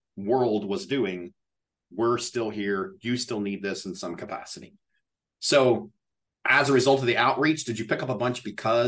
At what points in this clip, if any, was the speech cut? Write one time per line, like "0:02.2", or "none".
none